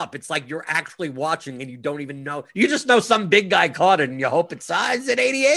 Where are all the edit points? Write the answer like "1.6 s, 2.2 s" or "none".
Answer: 2.5 s